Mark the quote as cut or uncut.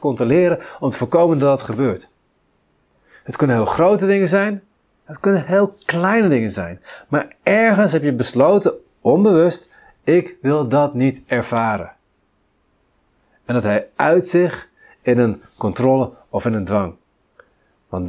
uncut